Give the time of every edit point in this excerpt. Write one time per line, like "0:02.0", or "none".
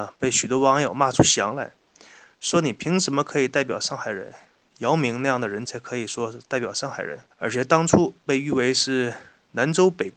0:05.6
0:07.3